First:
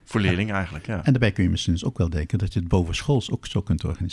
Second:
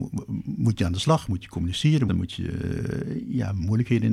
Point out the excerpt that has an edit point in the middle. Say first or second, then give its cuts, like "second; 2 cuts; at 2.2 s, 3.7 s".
second; 1 cut; at 2.1 s